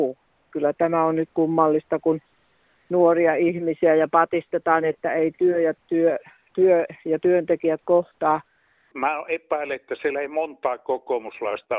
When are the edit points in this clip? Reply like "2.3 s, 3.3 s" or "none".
8.9 s